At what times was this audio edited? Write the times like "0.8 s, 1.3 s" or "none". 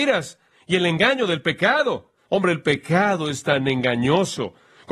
2.2 s